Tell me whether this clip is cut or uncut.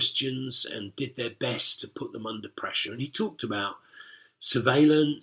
uncut